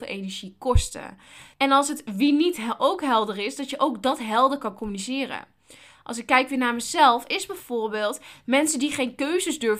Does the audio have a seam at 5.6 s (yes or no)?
no